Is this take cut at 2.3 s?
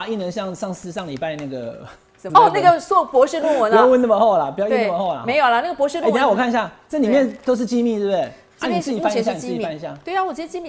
yes; 1 cut; at 2.3 s

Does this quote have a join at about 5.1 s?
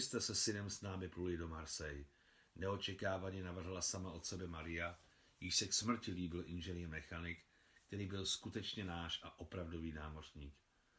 no; 0 cuts

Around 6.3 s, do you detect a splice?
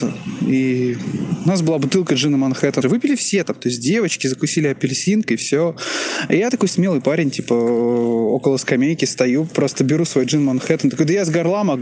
no; 1 cut; at 2.8 s

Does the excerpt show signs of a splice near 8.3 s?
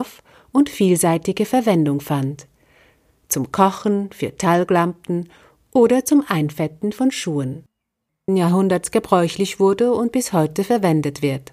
yes; 1 cut; at 8.3 s

